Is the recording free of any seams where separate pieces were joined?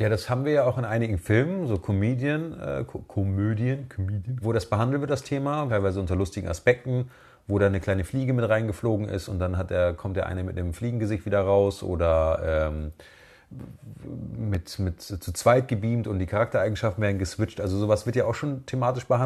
no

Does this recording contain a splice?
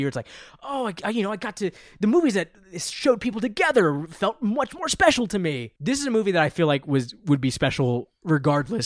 yes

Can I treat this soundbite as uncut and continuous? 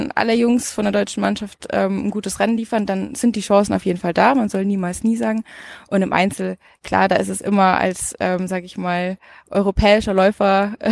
yes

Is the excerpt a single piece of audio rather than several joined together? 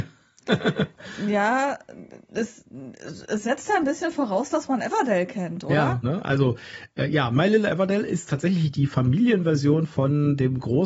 no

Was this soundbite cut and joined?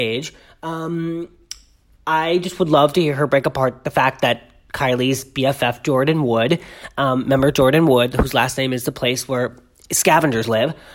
no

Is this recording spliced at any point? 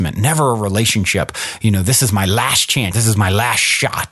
yes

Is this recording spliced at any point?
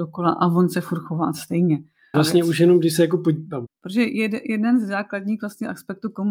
yes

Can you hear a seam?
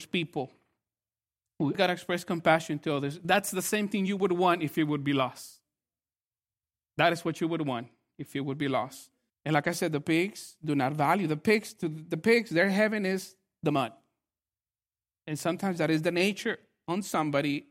yes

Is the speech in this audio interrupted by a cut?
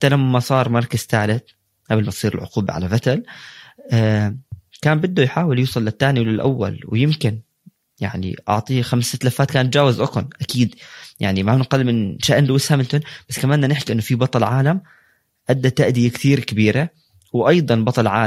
no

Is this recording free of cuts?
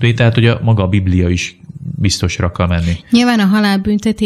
yes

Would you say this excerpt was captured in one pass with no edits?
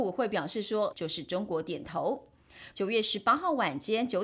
no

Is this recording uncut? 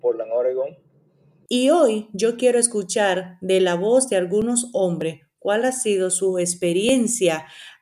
no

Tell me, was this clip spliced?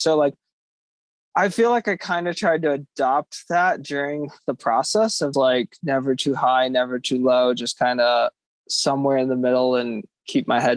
yes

